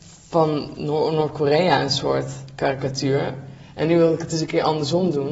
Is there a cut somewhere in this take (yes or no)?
no